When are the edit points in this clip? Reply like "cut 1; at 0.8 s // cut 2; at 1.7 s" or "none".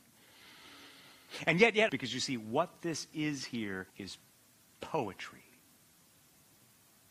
cut 1; at 1.9 s // cut 2; at 3.9 s